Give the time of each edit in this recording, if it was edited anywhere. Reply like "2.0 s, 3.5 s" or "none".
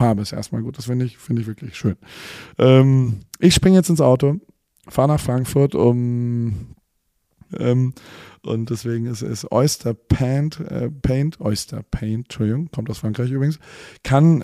7.5 s